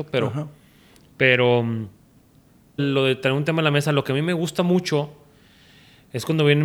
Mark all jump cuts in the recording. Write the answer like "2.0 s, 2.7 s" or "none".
2.8 s